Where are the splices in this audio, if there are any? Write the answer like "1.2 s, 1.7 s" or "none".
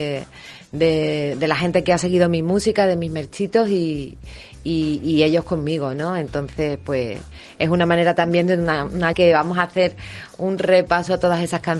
9.1 s